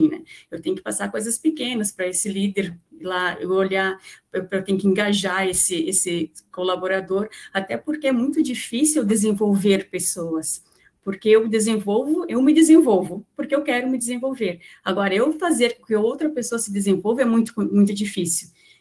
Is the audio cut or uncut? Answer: uncut